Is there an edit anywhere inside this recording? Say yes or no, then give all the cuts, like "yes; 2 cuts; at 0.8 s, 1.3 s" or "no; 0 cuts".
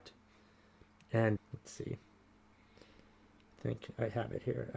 yes; 1 cut; at 1.4 s